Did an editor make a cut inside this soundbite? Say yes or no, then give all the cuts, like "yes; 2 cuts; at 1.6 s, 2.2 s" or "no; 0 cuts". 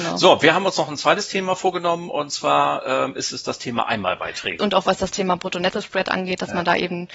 yes; 1 cut; at 4.6 s